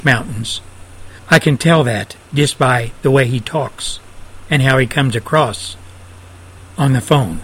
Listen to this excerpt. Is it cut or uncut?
cut